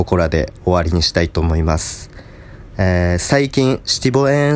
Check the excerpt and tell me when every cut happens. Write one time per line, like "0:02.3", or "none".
0:02.7